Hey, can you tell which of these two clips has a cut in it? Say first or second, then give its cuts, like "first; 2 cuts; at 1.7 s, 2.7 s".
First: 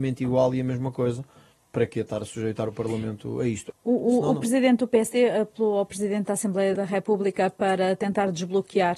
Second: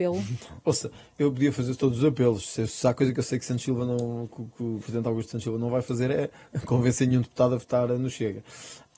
first; 1 cut; at 6.8 s